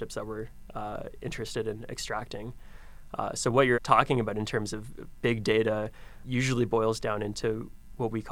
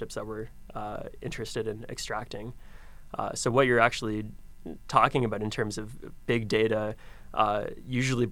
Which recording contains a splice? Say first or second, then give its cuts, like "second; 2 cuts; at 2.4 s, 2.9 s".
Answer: first; 2 cuts; at 3.7 s, 6.2 s